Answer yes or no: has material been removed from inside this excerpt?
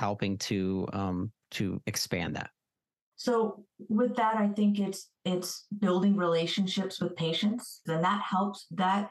yes